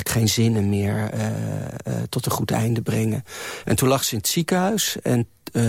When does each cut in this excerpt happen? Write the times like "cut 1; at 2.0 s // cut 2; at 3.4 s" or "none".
cut 1; at 3.6 s